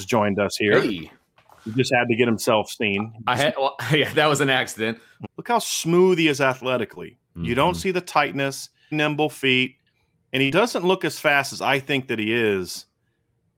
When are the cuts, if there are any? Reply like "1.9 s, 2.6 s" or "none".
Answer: 5.2 s, 8.9 s